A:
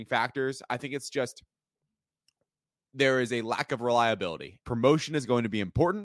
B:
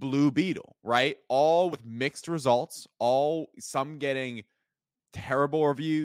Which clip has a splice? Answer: A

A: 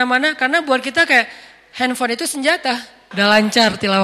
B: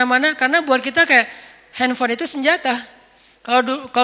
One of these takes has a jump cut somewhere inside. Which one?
A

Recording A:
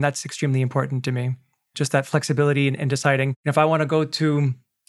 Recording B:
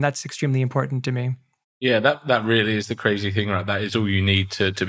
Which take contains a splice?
B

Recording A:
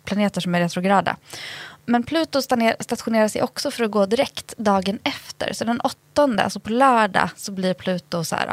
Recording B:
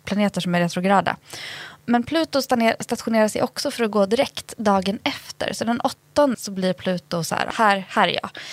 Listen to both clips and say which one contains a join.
B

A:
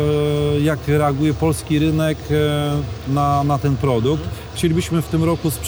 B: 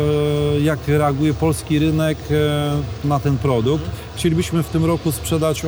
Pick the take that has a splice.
B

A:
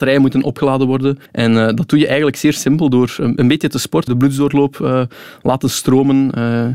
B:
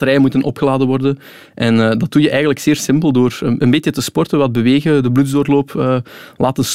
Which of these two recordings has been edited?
A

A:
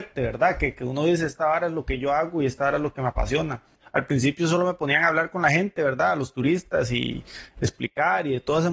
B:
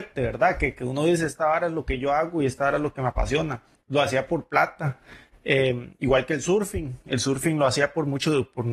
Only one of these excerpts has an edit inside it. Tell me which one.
A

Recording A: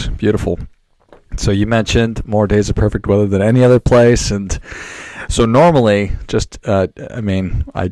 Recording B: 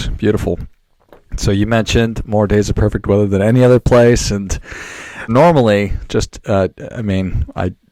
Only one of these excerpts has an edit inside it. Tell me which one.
B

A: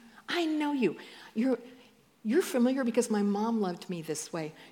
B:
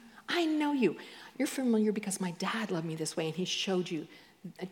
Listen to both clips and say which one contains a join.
B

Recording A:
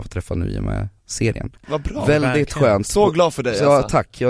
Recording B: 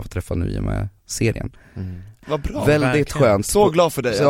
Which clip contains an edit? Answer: A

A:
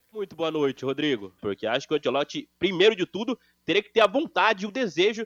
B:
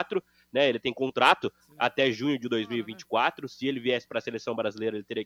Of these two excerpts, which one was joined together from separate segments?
A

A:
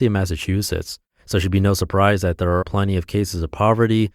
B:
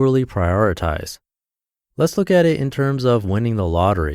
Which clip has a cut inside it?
A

